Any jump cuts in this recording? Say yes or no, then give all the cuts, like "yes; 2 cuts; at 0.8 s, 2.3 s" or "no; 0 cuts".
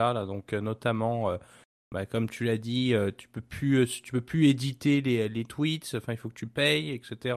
no; 0 cuts